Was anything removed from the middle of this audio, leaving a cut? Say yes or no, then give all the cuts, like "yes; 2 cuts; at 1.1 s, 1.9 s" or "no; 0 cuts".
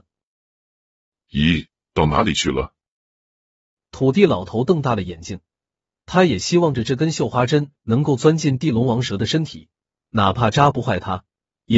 no; 0 cuts